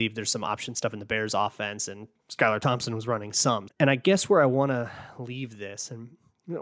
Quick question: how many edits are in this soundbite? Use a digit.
1